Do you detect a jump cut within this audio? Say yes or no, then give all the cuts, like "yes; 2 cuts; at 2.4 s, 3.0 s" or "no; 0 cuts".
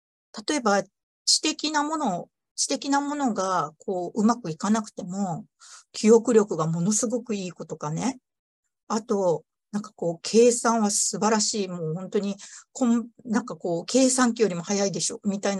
no; 0 cuts